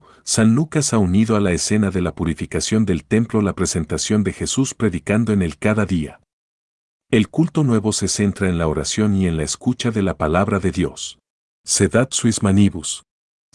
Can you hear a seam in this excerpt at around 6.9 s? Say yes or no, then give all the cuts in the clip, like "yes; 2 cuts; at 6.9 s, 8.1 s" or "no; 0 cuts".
no; 1 cut; at 11.5 s